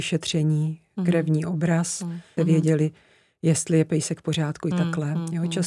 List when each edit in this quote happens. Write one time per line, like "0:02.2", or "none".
0:02.4